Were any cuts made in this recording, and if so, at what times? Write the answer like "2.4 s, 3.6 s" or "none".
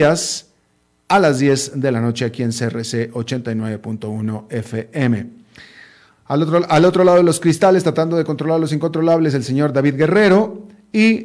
none